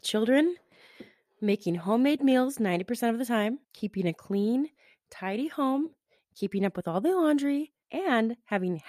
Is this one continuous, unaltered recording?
no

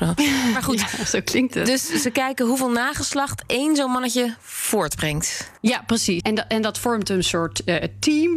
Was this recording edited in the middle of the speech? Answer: yes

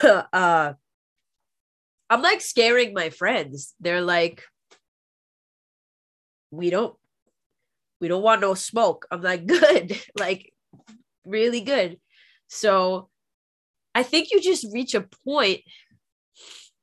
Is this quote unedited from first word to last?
yes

